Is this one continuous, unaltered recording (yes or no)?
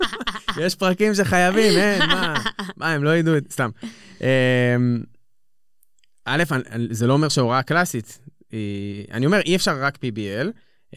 yes